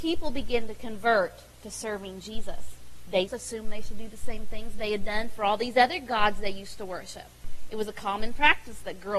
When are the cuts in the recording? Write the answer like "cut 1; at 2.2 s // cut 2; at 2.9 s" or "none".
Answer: cut 1; at 3.3 s